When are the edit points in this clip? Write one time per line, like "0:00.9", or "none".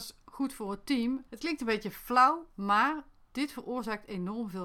0:01.3